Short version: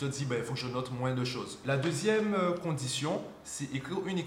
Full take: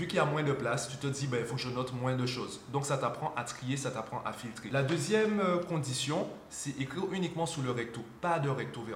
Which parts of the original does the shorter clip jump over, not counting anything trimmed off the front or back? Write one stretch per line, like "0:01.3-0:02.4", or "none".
0:02.7-0:04.7